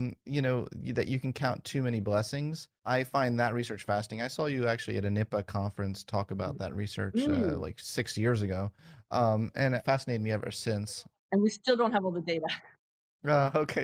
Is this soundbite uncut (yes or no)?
yes